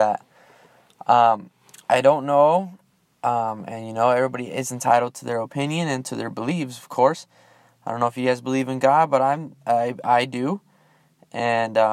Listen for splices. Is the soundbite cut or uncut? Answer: uncut